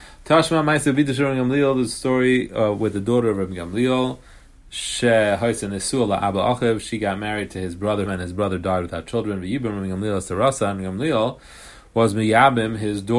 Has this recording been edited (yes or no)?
yes